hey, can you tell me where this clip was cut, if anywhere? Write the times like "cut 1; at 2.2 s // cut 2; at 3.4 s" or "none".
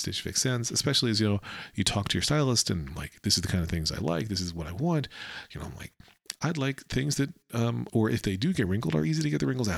cut 1; at 6.3 s // cut 2; at 7.9 s

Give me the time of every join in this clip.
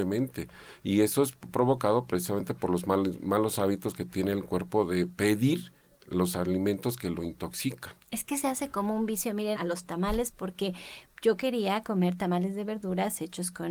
cut 1; at 9.6 s

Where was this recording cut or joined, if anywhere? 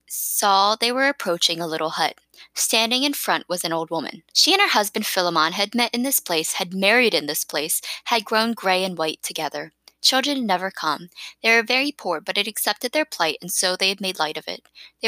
cut 1; at 4.3 s

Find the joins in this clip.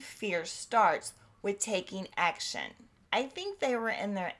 cut 1; at 3.0 s

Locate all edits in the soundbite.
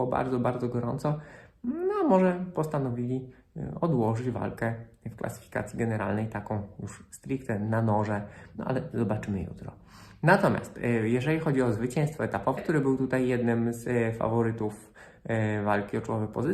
cut 1; at 8.6 s // cut 2; at 12.6 s

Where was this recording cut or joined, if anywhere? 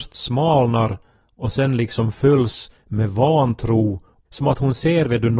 cut 1; at 4.2 s

